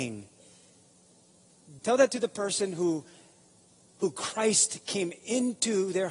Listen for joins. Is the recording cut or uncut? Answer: cut